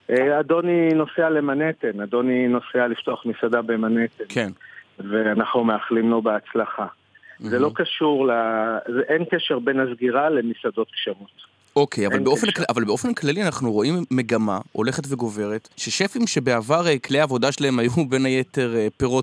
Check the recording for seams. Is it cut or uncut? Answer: cut